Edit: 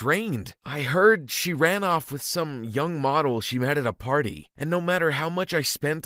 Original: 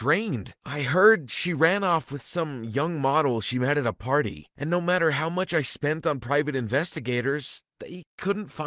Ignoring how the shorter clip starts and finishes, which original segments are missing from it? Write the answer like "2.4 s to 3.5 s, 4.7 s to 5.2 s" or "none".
none